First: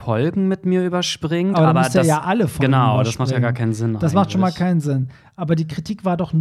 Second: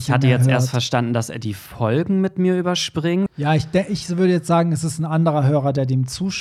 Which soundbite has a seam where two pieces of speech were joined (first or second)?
second